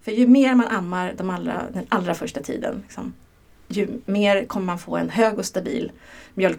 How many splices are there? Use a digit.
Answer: 0